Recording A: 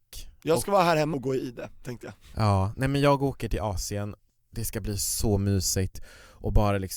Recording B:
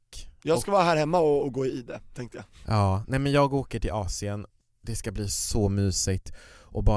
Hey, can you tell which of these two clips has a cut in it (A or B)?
A